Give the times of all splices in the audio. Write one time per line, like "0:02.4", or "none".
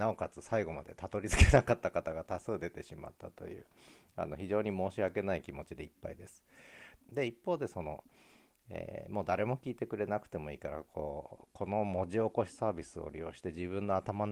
0:07.0